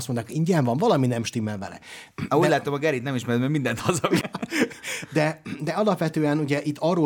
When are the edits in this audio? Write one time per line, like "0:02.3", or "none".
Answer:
0:04.2